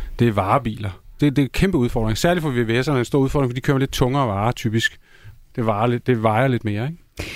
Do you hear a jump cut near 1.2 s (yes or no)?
yes